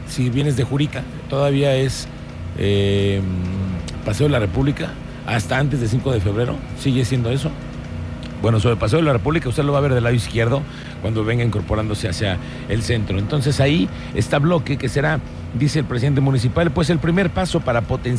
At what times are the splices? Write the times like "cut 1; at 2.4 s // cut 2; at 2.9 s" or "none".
none